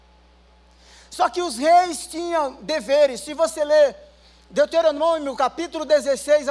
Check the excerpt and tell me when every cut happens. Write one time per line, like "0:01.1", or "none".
none

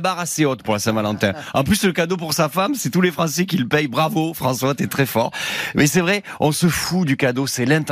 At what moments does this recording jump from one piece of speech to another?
none

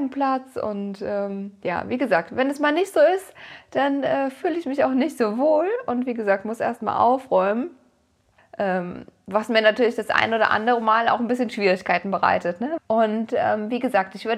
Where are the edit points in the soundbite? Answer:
0:08.4
0:12.8

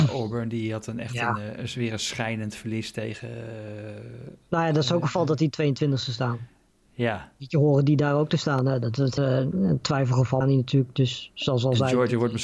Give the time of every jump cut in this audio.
0:09.2
0:10.4

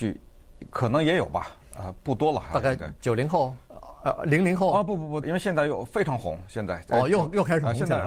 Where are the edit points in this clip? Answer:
0:05.2

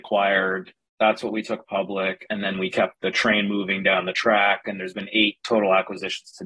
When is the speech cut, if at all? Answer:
0:02.9

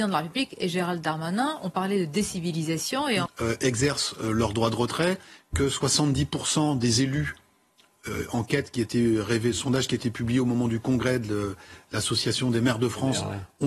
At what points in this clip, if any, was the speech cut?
0:03.3

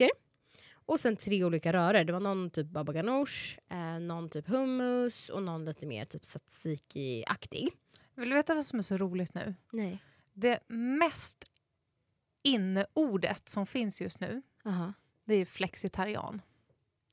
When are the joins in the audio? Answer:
none

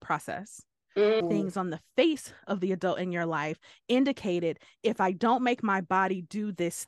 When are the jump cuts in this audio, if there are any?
0:01.2

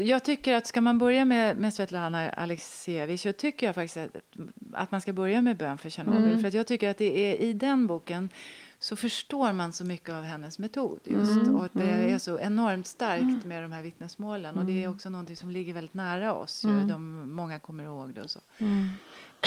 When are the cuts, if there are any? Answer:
none

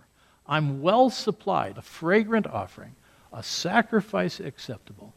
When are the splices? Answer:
0:01.7

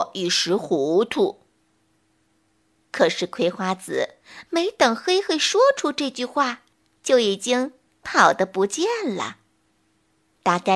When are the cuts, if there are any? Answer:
none

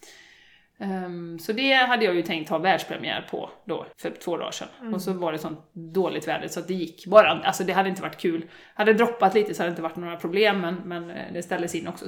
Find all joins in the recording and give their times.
0:03.9

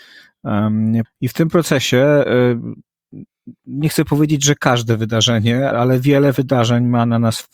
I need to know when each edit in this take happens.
0:01.0
0:05.7

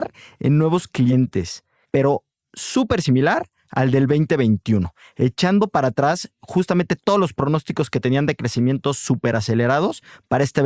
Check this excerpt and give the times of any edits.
none

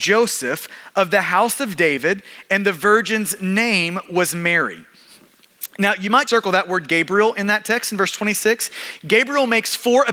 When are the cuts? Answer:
0:06.3

